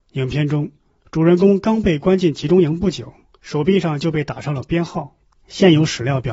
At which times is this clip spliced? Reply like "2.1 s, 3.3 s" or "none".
none

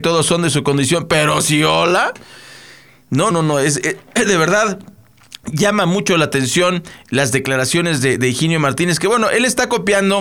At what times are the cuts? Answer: 3.3 s

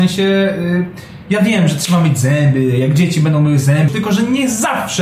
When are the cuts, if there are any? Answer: 3.9 s

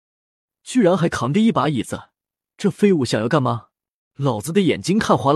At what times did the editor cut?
4.1 s

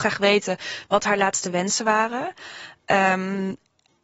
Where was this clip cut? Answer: none

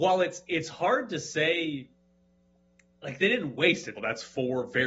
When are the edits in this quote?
4.0 s

